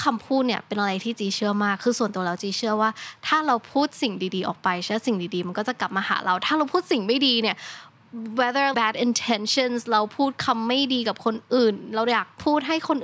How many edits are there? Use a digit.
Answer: 1